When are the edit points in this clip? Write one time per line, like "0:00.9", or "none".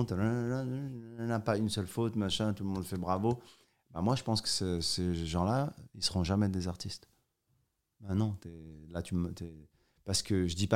0:07.9